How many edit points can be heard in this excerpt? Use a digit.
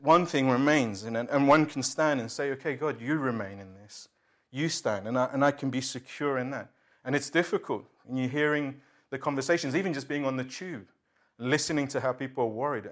0